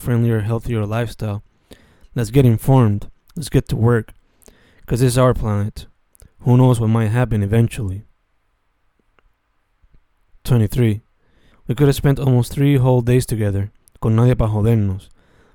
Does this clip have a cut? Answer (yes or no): yes